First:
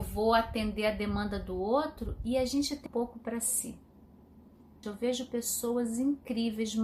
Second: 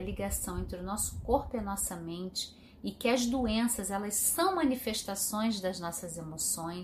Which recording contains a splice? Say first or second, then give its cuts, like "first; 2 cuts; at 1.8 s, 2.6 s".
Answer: first; 2 cuts; at 2.9 s, 4.8 s